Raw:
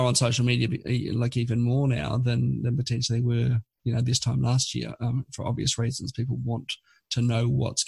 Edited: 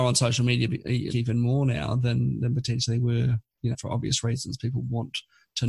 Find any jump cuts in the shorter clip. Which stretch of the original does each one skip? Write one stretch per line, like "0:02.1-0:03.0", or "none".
0:01.1-0:01.3
0:03.9-0:05.3